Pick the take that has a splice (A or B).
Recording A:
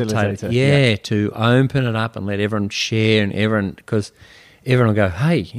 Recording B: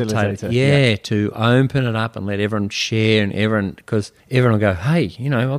B